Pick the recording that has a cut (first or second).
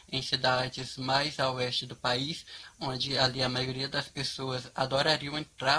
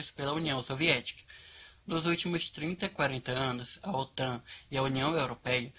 second